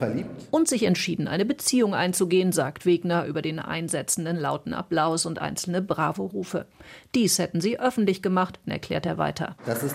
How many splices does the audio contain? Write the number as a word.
one